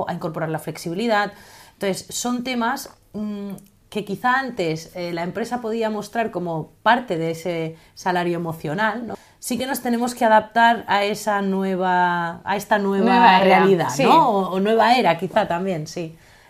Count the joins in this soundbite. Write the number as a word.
one